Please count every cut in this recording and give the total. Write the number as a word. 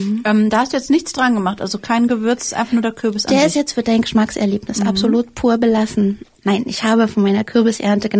one